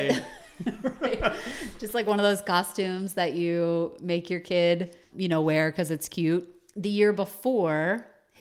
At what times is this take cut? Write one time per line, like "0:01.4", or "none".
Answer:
0:05.1